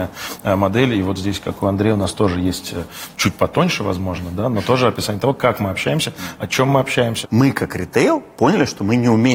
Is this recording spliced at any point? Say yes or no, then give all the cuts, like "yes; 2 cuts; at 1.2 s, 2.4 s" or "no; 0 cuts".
yes; 1 cut; at 7.2 s